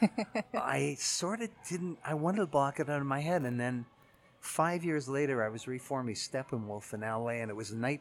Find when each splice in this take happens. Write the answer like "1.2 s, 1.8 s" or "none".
none